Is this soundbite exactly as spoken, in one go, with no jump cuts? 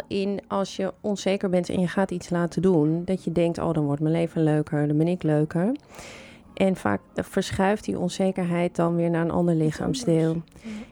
no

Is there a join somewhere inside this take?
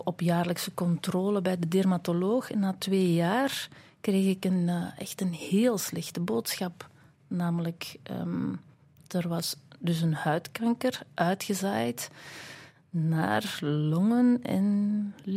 no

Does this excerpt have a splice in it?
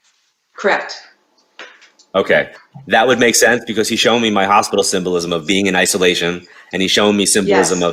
no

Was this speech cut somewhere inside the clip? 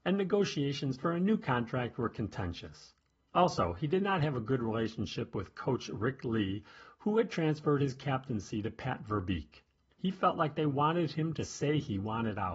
yes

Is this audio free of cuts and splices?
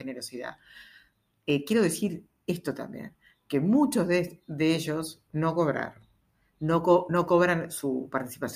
yes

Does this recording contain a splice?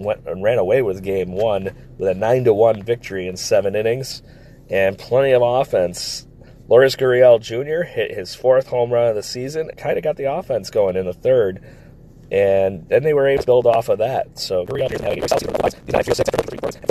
yes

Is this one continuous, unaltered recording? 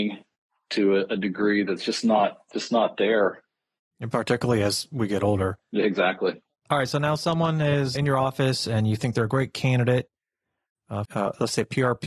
no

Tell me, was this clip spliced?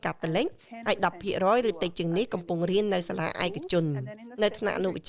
no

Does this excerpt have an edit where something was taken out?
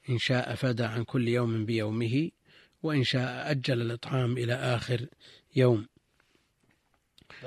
no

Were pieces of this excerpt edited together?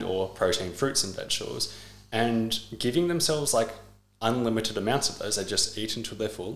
no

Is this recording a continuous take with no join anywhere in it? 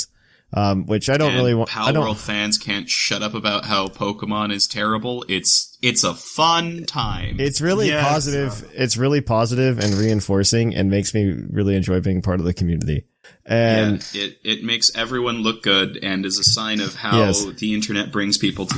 yes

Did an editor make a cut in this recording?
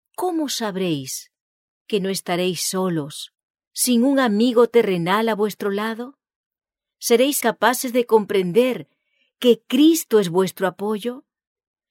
yes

